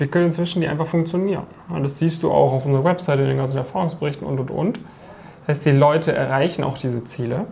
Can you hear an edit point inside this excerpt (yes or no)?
no